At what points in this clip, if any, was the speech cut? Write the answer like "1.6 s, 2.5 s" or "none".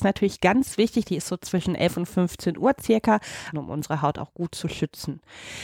1.0 s, 3.5 s